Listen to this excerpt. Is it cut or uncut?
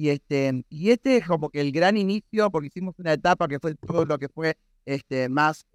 uncut